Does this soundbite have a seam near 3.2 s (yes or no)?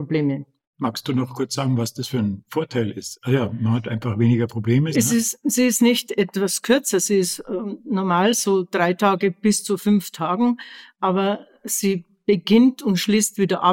no